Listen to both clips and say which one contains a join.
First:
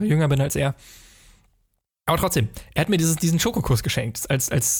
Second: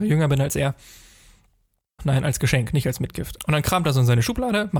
second; 2 cuts; at 2.0 s, 3.4 s

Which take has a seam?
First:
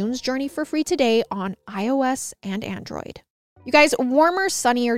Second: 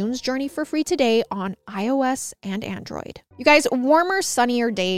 second; 1 cut; at 3.3 s

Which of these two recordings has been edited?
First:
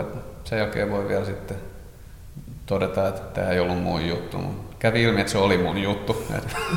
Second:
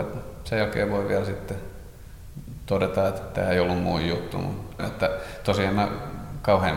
second; 1 cut; at 4.8 s

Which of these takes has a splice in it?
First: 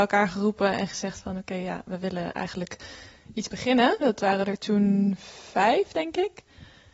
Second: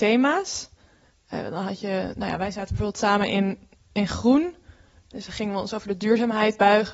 first; 1 cut; at 4.0 s

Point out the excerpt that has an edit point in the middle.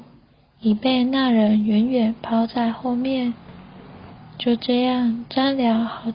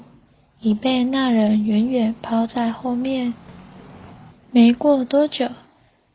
second; 1 cut; at 4.3 s

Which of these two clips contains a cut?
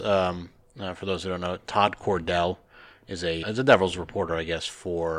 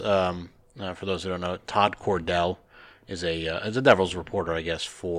first; 1 cut; at 3.4 s

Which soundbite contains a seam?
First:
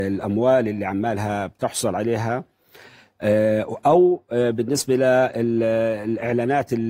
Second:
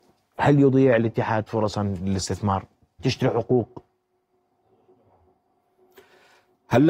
second; 1 cut; at 3.0 s

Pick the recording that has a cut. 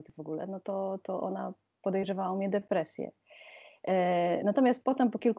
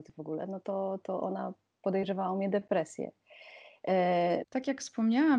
second; 1 cut; at 4.4 s

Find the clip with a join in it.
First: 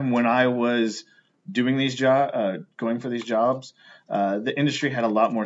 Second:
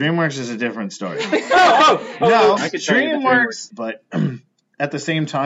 second; 2 cuts; at 2.6 s, 3.7 s

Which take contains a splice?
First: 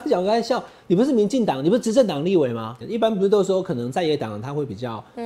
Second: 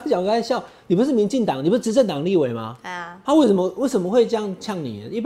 first; 1 cut; at 2.8 s

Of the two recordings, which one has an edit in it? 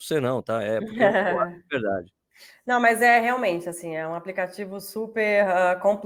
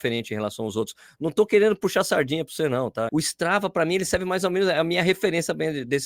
second; 1 cut; at 3.1 s

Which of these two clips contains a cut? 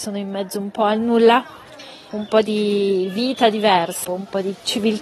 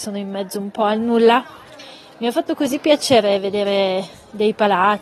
first; 2 cuts; at 2.1 s, 4.0 s

